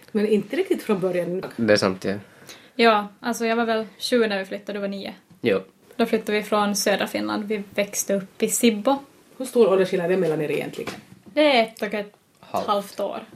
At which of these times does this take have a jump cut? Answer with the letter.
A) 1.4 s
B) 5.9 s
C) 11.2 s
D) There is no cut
A